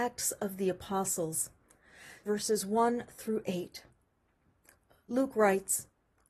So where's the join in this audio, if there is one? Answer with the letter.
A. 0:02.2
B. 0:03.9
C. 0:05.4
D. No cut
A